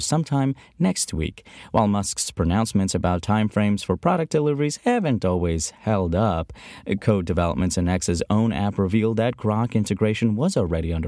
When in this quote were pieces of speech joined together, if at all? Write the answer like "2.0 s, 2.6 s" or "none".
none